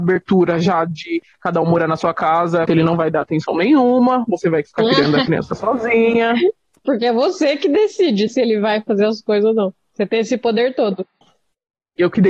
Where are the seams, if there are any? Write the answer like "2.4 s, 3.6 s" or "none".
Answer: 2.7 s, 8.3 s